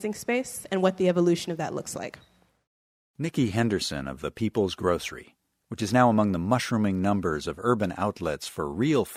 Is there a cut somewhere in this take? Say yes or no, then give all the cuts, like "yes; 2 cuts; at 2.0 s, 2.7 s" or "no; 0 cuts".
no; 0 cuts